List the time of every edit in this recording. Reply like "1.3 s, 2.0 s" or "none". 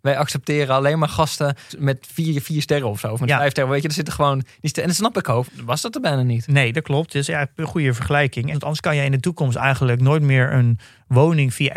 5.5 s, 8.5 s